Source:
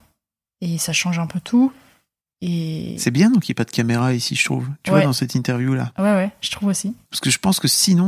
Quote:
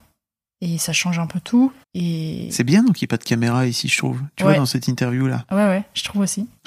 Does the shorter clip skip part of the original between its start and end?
yes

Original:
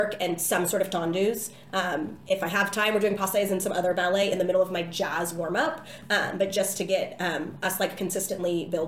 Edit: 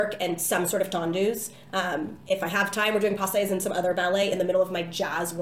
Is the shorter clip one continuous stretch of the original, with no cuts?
yes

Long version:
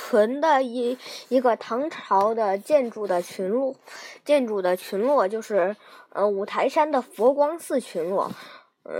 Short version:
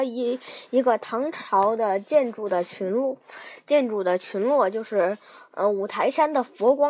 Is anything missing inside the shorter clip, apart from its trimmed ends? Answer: no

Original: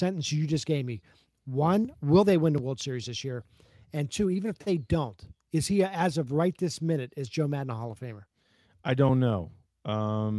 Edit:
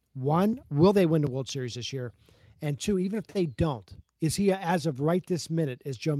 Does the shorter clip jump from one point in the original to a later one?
no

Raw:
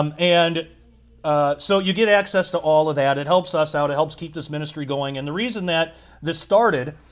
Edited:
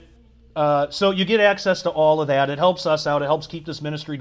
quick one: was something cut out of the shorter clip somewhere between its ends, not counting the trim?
no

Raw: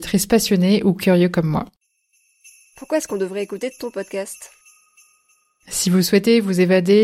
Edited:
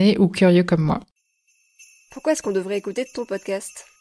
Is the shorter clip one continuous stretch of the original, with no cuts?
yes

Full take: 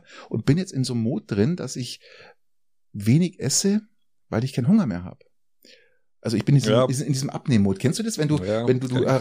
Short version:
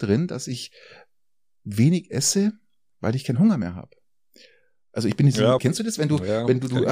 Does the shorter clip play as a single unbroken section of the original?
no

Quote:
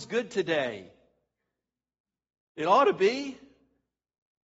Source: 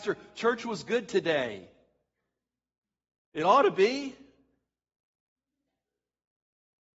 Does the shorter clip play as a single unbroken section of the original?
yes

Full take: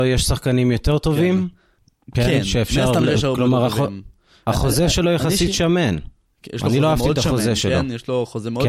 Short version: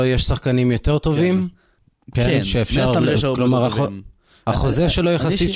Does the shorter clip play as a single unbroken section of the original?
yes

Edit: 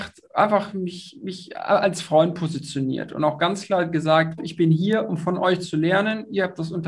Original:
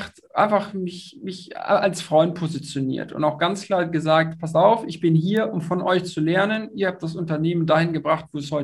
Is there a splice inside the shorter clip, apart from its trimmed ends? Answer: yes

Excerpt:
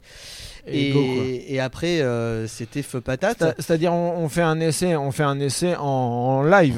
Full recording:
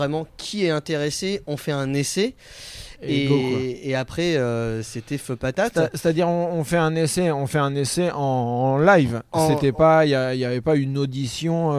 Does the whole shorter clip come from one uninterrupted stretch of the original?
yes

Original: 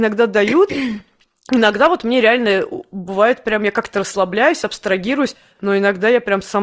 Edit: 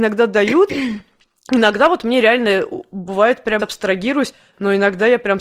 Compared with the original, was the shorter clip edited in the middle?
yes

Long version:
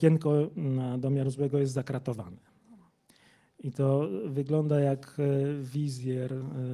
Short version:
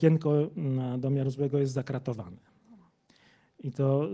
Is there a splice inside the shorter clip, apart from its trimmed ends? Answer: no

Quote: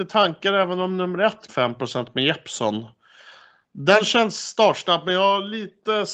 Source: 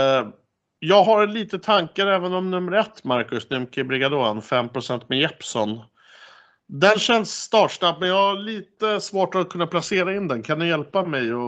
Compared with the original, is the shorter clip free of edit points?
no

